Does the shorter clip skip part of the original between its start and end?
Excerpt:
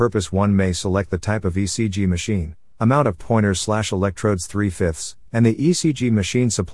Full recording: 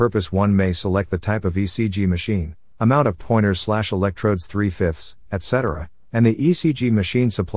yes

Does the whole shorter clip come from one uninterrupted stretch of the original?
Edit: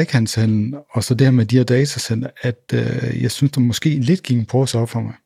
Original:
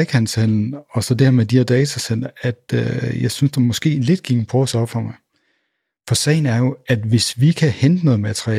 yes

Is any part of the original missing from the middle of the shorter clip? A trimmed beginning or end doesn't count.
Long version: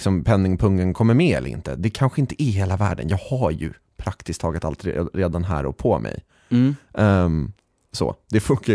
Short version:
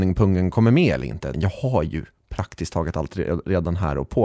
yes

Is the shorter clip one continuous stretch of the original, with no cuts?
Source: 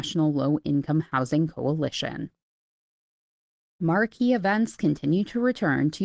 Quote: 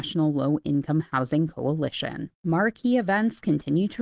no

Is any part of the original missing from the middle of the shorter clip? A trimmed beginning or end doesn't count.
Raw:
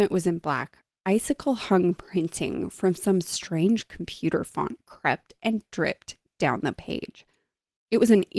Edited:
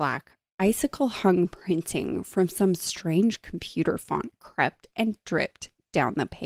no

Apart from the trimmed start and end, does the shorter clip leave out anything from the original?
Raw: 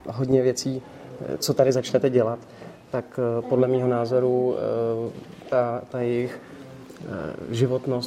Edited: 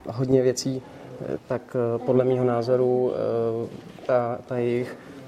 yes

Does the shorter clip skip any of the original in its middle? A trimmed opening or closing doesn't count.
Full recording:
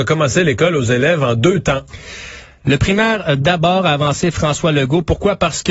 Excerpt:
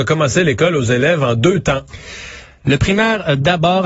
no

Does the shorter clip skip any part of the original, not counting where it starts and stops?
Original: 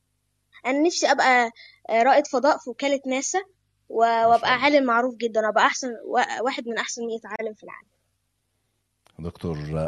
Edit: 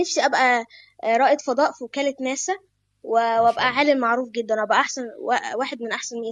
no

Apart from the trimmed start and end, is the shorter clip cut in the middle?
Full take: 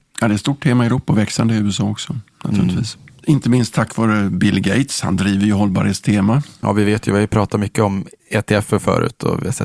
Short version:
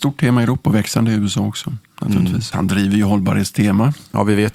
yes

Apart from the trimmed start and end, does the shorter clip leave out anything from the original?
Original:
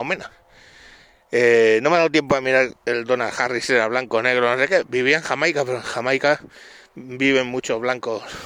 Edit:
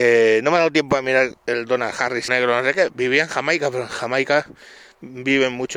yes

